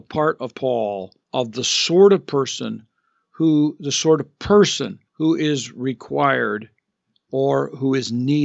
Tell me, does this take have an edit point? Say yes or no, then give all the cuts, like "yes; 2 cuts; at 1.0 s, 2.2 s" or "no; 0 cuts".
yes; 2 cuts; at 1.2 s, 5.1 s